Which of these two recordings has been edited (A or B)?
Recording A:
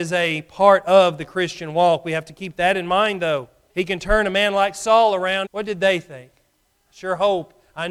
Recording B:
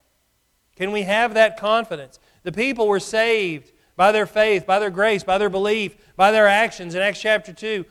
A